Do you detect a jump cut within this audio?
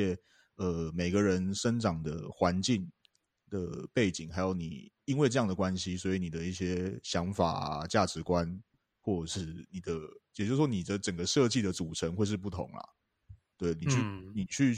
no; 0 cuts

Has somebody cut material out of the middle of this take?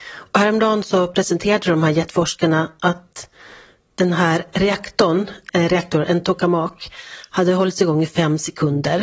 yes; 1 cut; at 5.5 s

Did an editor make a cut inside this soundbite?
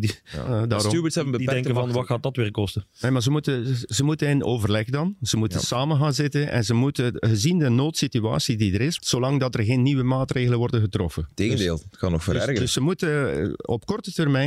yes; 1 cut; at 9.0 s

